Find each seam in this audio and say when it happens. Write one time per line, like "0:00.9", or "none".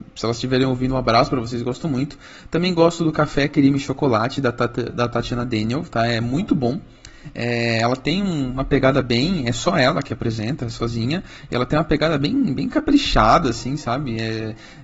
none